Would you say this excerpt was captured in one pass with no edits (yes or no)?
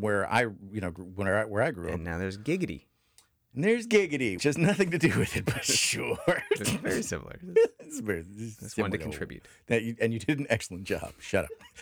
no